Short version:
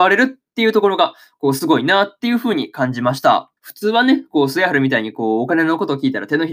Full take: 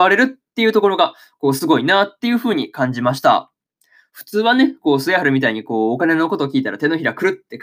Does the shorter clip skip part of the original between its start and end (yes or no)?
yes